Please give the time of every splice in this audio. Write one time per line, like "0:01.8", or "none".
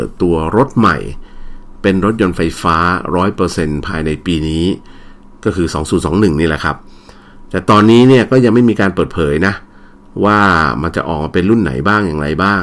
none